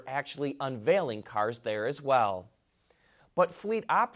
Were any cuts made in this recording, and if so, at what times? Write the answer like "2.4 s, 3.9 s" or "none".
3.2 s